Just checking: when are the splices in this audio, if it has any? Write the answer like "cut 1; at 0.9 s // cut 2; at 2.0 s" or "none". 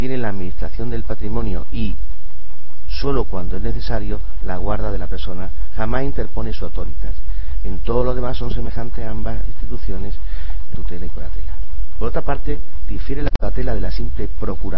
cut 1; at 10.7 s